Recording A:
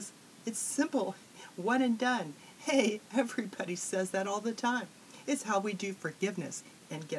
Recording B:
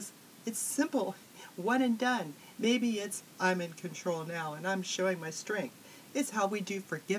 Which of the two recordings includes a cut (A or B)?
B